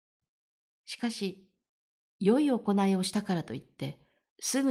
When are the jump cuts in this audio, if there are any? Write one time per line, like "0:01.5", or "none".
none